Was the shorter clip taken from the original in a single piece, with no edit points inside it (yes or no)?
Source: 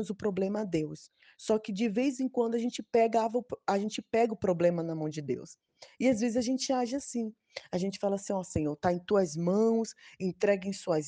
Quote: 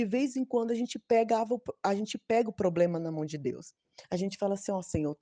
no